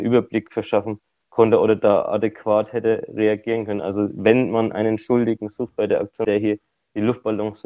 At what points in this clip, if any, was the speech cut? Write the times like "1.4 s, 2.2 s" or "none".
6.2 s